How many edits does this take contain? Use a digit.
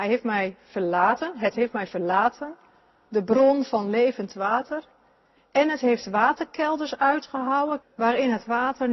1